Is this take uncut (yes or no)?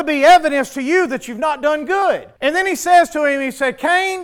no